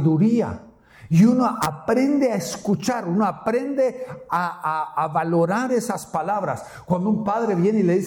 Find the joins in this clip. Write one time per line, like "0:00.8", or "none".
none